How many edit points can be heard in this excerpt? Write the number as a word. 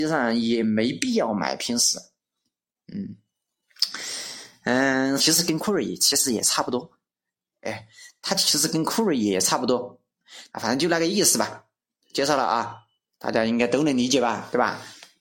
three